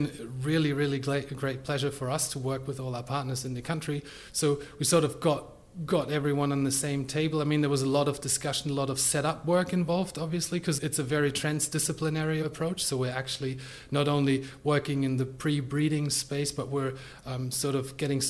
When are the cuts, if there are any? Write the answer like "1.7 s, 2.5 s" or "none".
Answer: 10.8 s

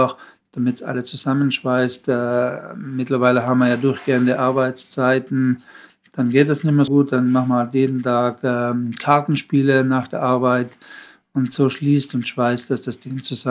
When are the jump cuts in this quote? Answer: 6.9 s

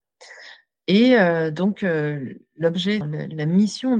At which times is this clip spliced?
3.0 s

